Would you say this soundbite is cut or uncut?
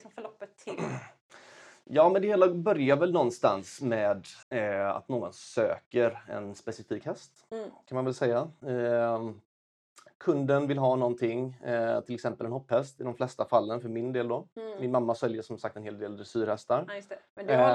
cut